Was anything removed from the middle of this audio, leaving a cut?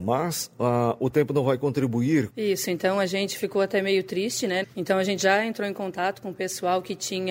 yes; 2 cuts; at 2.3 s, 4.6 s

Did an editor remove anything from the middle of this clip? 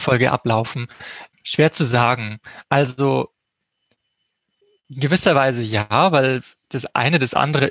no; 0 cuts

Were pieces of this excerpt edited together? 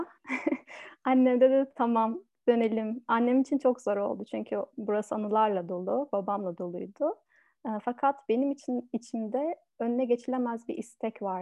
no; 0 cuts

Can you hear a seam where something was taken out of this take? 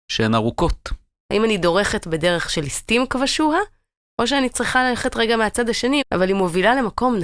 yes; 2 cuts; at 1.2 s, 6.0 s

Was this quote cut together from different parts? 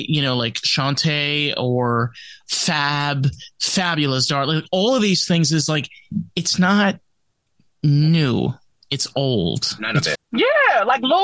yes; 2 cuts; at 2.4 s, 10.1 s

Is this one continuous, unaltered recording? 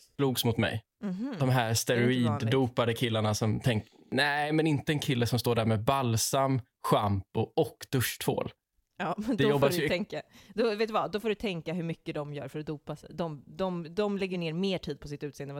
no; 1 cut; at 0.9 s

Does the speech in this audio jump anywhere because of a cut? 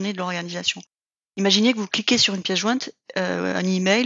no; 0 cuts

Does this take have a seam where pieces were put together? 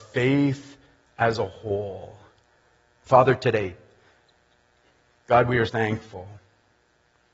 yes; 2 cuts; at 3.0 s, 5.7 s

